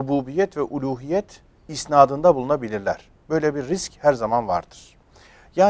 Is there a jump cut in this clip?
no; 0 cuts

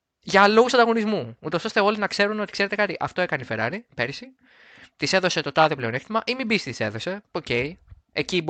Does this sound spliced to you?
no; 0 cuts

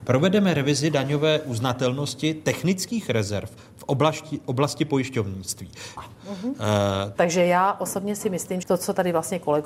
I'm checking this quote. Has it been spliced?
yes; 3 cuts; at 6.0 s, 7.2 s, 8.6 s

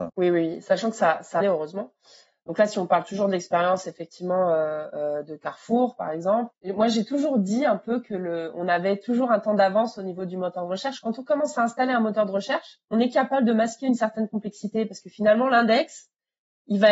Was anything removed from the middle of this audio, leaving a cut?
yes; 1 cut; at 1.4 s

